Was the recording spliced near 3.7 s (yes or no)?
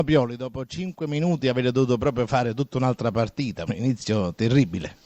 yes